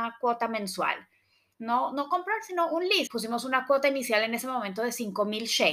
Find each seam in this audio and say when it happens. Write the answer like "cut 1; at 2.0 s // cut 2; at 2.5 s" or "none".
cut 1; at 1.5 s // cut 2; at 3.1 s